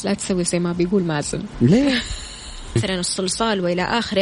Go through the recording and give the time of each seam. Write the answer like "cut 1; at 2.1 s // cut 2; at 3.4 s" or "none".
cut 1; at 2.8 s